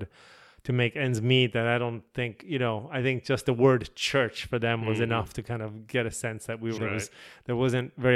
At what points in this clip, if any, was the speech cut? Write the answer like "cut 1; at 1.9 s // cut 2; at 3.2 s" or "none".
cut 1; at 6.8 s